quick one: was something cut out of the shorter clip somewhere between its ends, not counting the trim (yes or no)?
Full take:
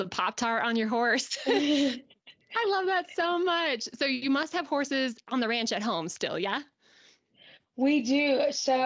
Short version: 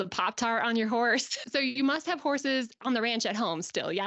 yes